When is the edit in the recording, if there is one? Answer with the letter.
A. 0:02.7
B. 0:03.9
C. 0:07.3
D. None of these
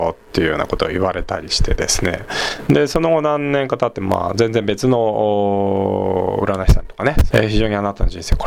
C